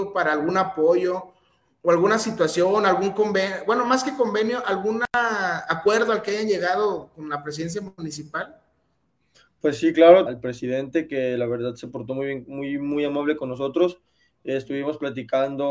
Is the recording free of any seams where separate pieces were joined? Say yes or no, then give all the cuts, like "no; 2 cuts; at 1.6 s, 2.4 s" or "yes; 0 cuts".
no; 1 cut; at 10.3 s